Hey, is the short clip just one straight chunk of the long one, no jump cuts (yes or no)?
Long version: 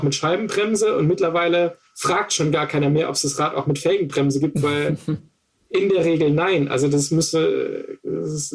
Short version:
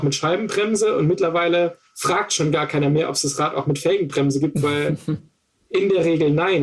yes